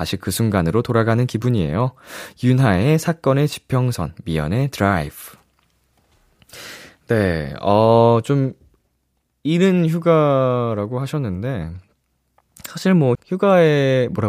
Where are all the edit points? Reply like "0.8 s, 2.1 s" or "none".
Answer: 13.2 s